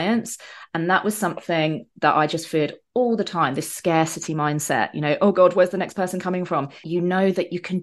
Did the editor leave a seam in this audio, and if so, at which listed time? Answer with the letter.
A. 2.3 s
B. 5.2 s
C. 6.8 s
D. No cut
C